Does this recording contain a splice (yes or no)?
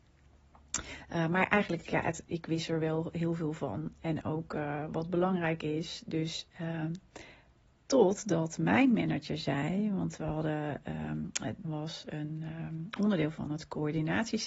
yes